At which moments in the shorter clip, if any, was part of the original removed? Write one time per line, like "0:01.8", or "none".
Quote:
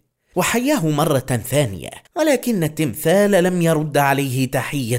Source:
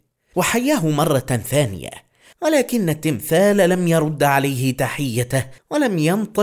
0:02.1